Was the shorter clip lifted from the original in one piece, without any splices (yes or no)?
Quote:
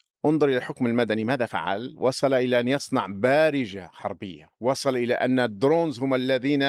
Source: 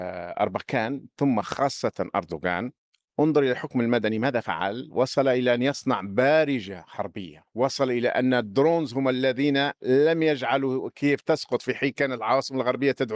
yes